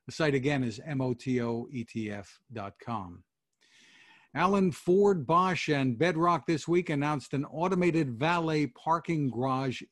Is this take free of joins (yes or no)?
yes